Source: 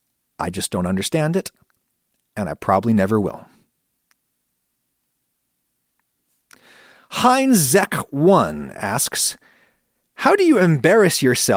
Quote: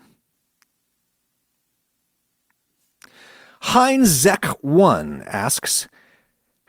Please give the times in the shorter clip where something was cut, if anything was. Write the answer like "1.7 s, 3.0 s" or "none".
none